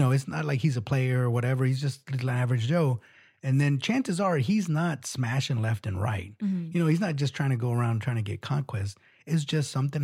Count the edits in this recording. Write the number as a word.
zero